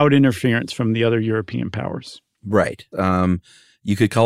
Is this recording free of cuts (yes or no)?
no